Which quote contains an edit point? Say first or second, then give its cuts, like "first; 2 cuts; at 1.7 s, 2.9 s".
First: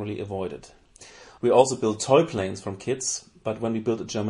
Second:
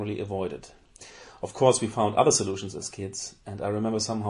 first; 1 cut; at 1.4 s